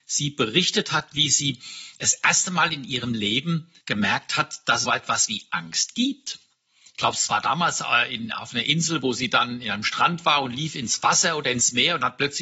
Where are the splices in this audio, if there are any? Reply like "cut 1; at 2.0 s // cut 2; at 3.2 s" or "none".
cut 1; at 3.8 s // cut 2; at 4.8 s